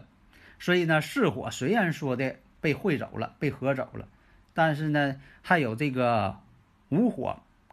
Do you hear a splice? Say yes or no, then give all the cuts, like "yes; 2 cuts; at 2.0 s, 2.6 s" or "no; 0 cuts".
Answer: no; 0 cuts